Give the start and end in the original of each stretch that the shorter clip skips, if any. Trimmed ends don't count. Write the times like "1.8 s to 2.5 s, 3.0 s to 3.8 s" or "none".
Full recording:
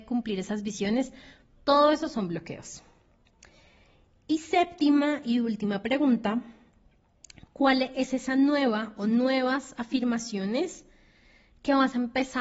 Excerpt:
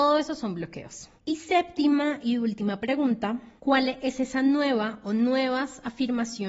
2.9 s to 4.2 s, 6.6 s to 7.5 s